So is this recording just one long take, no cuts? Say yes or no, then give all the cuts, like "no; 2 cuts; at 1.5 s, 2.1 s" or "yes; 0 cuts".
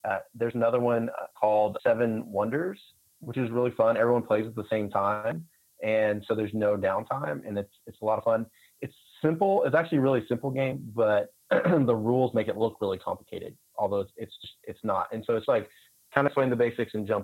no; 2 cuts; at 1.8 s, 15.5 s